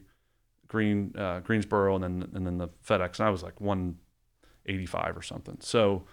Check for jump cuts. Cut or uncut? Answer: uncut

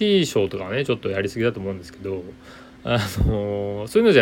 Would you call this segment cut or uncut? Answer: uncut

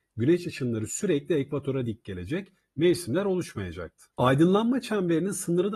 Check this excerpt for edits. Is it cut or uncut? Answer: cut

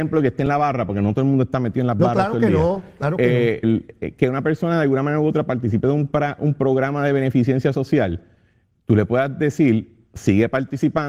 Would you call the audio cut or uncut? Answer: cut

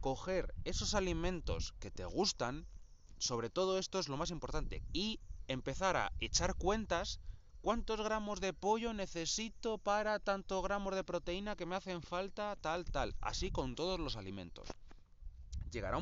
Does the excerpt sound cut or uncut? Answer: cut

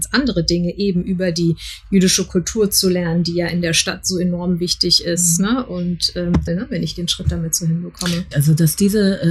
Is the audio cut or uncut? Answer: cut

